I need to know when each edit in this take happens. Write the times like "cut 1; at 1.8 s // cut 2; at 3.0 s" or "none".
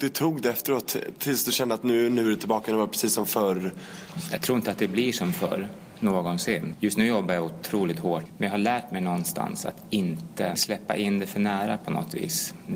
none